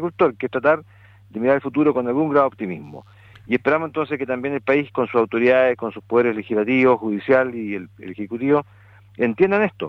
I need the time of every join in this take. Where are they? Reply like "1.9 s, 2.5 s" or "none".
none